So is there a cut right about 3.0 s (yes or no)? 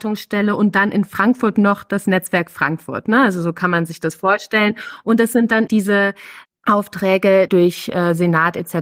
no